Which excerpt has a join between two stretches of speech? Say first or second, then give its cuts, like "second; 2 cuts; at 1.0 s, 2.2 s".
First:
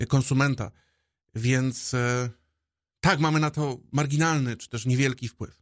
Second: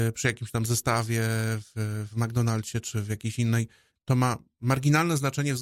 second; 2 cuts; at 2.1 s, 3.9 s